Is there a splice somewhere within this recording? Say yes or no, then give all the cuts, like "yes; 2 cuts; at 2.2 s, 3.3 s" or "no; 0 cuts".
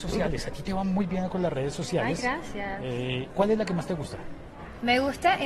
no; 0 cuts